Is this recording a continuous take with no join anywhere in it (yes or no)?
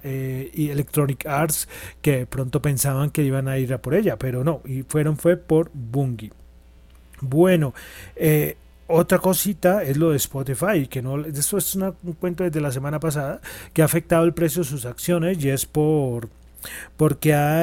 yes